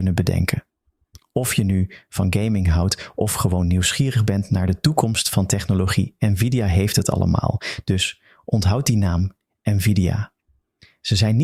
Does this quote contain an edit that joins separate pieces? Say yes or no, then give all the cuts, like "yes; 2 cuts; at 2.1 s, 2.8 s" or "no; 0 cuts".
no; 0 cuts